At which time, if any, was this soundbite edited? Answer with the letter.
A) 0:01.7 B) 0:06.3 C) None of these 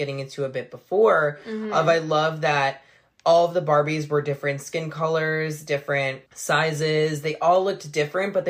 B